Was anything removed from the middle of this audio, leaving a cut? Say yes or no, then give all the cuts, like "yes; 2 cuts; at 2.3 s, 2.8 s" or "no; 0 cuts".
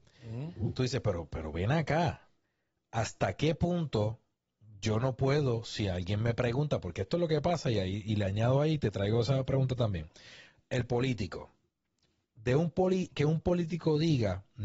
no; 0 cuts